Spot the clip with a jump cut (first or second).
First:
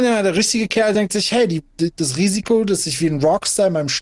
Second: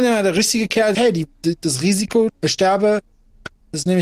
second